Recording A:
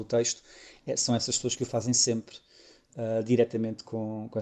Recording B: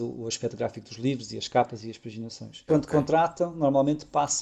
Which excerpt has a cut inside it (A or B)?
B